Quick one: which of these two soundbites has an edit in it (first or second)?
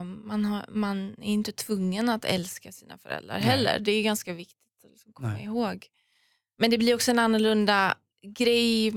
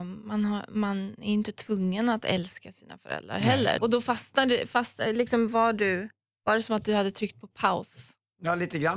second